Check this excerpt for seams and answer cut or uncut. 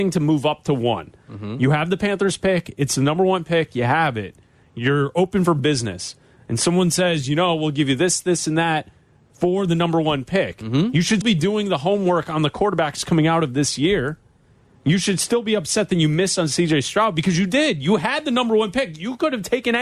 cut